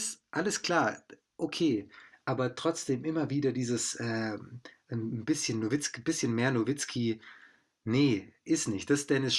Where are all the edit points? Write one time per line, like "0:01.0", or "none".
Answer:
none